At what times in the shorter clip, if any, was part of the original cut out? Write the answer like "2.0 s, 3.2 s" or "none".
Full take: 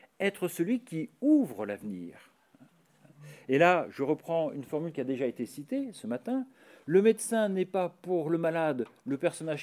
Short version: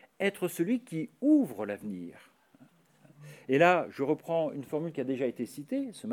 none

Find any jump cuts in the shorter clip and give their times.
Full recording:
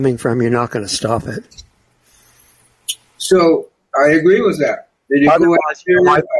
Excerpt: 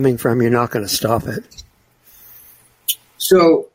none

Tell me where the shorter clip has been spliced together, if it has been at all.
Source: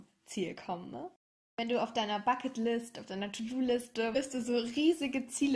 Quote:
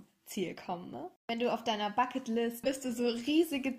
1.2 s, 2.6 s

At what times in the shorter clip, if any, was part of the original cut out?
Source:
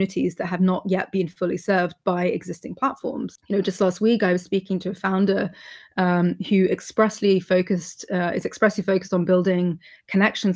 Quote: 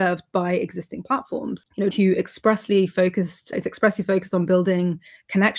1.9 s, 3.5 s

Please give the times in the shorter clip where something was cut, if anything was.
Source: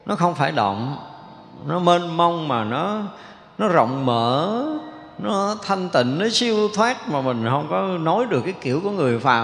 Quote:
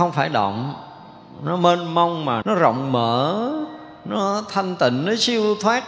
2.4 s

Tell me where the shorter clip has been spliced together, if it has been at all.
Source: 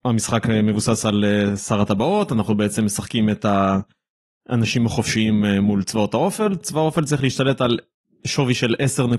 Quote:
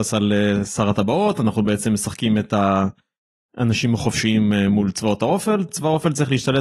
none

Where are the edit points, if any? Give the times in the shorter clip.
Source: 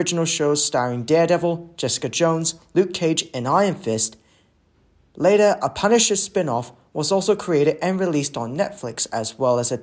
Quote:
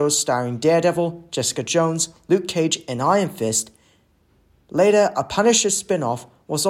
none

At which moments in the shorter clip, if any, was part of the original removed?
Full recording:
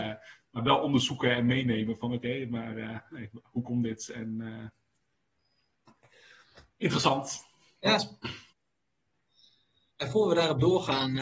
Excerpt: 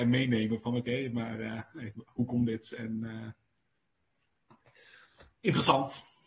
none

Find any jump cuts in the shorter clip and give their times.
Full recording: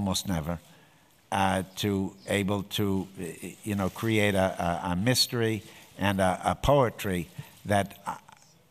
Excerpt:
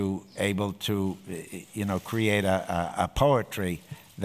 2.9 s

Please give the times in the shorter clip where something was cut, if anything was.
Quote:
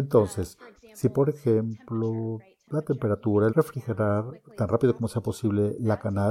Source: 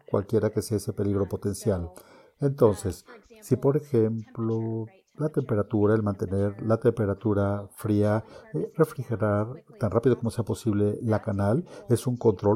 3.5 s

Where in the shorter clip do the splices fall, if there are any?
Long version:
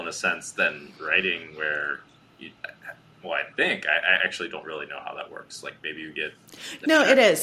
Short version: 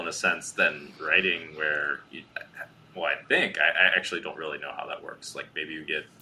2.1 s

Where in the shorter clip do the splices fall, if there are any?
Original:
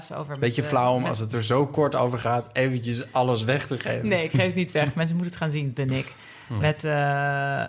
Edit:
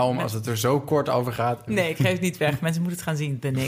1.7 s

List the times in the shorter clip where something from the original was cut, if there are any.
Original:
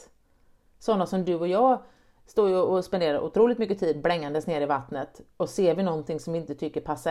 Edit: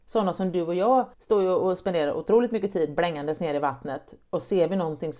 1.1 s

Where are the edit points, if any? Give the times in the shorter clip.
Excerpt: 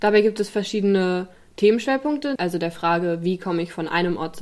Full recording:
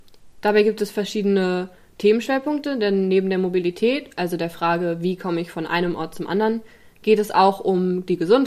2.4 s

